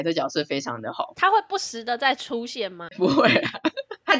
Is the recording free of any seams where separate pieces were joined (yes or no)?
yes